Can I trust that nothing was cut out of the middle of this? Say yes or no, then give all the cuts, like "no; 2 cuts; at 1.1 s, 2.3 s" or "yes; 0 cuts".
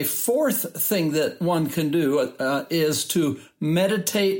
yes; 0 cuts